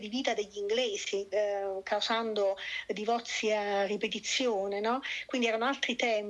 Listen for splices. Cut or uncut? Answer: uncut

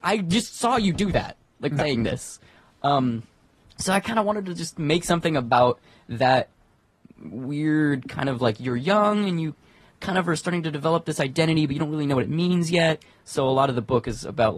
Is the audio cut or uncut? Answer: cut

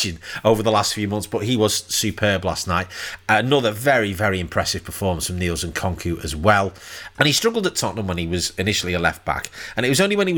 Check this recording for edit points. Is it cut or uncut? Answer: cut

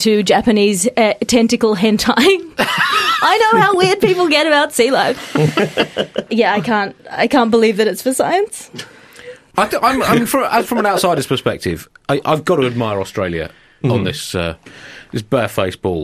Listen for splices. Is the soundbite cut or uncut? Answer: uncut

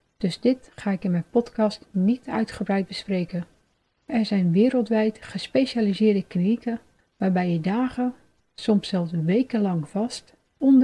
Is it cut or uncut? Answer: uncut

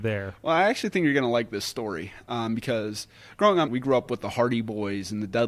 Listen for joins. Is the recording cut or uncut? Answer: cut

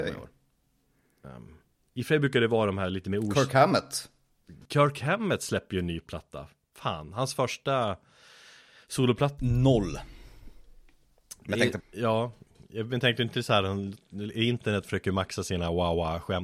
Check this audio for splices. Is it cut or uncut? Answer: cut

